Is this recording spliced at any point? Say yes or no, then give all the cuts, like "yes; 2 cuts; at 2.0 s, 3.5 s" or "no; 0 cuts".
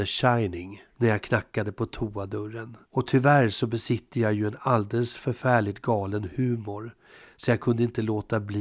yes; 1 cut; at 2.8 s